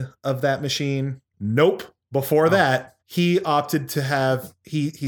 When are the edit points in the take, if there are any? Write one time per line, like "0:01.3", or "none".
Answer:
0:01.3
0:03.0